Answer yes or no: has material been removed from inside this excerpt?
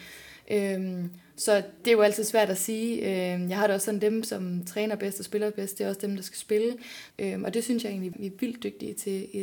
yes